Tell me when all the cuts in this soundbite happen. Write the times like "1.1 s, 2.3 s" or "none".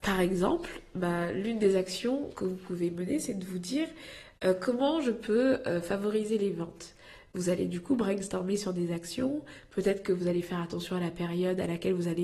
none